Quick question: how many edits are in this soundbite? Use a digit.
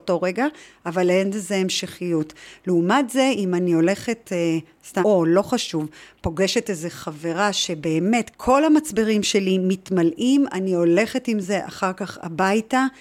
2